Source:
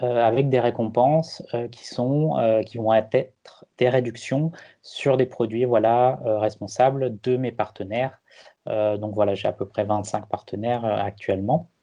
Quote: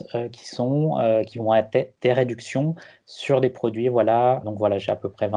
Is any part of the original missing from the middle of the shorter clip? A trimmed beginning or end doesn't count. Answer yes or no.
yes